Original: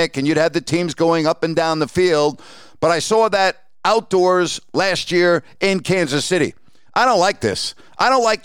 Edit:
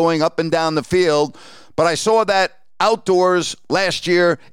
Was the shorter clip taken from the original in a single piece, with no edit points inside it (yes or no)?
yes